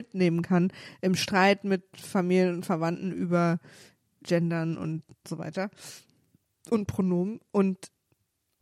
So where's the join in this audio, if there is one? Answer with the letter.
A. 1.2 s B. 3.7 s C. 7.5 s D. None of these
D